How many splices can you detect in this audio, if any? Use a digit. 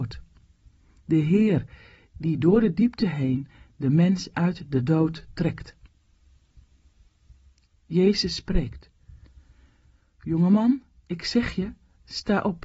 0